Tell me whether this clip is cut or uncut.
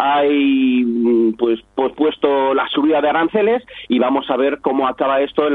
uncut